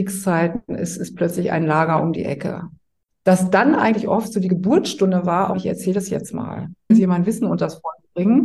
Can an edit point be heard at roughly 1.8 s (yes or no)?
no